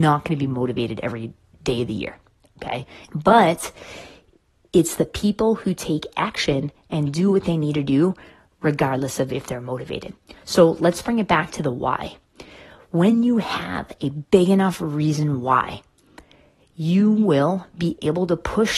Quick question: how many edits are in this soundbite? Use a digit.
1